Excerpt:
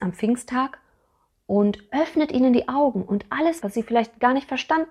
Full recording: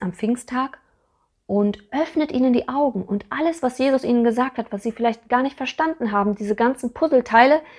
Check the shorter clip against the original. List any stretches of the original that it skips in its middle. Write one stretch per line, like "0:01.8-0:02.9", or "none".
0:03.6-0:04.7

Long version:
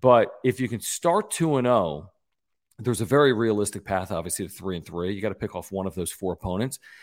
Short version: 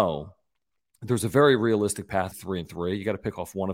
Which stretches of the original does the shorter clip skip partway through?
0:04.1-0:04.5

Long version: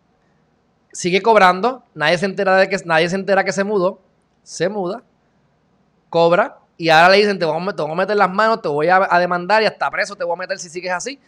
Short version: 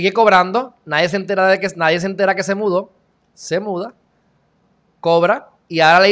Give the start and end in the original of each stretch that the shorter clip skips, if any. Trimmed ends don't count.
none

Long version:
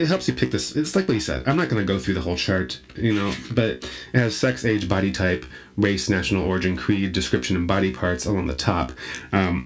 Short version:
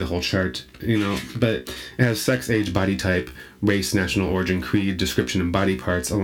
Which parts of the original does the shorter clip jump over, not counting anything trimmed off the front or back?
none

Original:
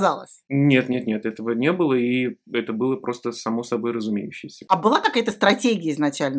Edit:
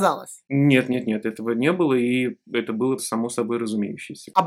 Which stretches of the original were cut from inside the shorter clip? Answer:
0:03.0-0:03.3

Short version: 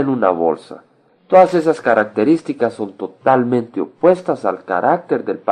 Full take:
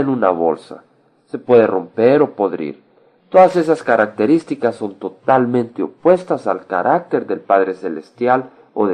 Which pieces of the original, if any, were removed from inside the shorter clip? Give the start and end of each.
0:01.1-0:03.1

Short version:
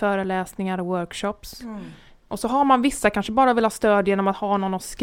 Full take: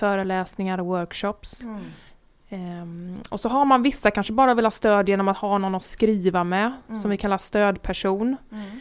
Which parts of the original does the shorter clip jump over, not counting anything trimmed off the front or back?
0:02.3-0:03.3

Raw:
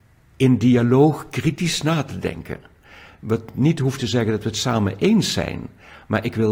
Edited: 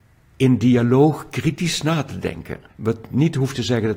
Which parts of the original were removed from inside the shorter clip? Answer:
0:02.7-0:03.1

